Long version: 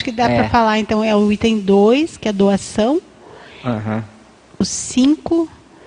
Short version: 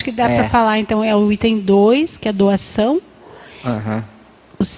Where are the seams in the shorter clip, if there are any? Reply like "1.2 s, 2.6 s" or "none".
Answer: none